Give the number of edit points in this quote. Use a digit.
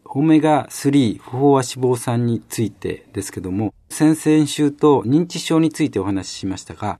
1